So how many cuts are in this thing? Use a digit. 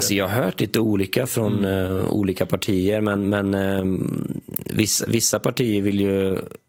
0